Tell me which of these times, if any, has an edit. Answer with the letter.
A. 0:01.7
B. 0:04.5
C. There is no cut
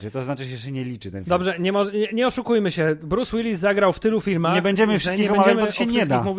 C